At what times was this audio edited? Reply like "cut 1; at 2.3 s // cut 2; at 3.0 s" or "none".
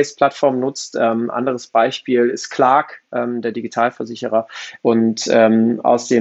cut 1; at 4.8 s